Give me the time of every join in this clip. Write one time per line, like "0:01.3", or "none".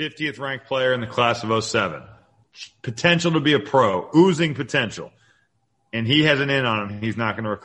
none